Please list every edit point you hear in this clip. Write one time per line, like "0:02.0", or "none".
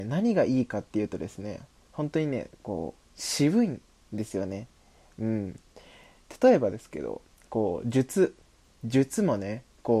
none